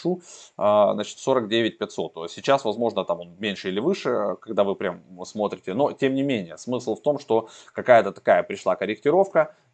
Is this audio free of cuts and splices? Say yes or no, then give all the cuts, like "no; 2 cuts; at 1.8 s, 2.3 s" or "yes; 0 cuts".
yes; 0 cuts